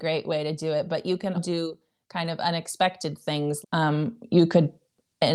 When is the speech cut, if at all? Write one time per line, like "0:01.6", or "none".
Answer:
0:01.3
0:03.6